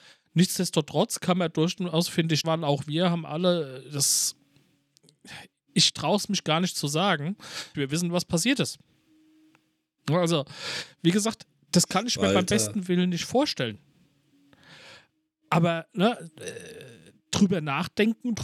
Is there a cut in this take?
yes; 2 cuts; at 2.4 s, 7.7 s

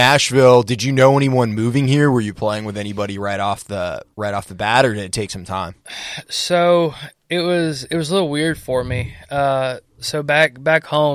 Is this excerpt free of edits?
yes; 0 cuts

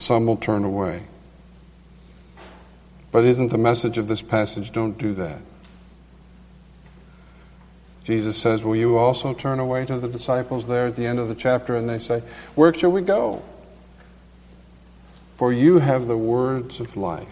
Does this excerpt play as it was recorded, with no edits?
yes; 0 cuts

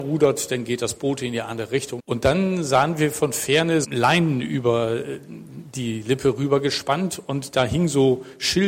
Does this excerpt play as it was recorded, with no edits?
no; 2 cuts; at 2.0 s, 3.8 s

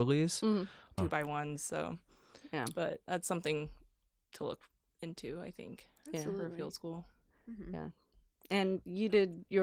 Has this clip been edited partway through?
yes; 1 cut; at 1.0 s

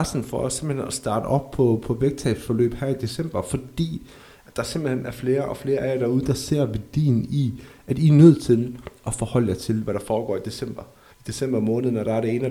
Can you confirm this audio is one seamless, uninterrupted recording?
no; 1 cut; at 11.1 s

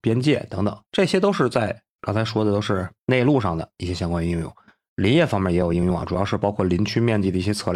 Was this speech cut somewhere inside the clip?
yes; 1 cut; at 4.9 s

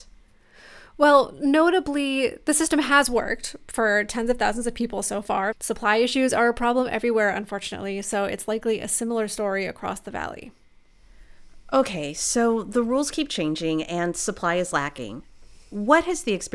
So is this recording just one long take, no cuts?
no; 1 cut; at 5.5 s

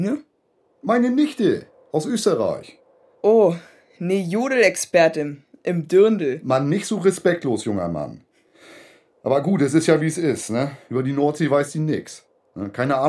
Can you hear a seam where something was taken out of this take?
no; 0 cuts

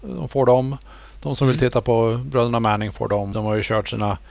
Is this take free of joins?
no; 1 cut; at 3.3 s

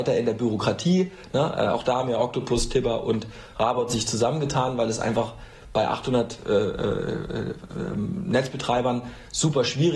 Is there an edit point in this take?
no; 0 cuts

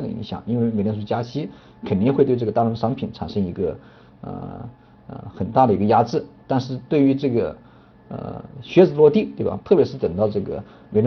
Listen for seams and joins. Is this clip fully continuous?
no; 1 cut; at 9.6 s

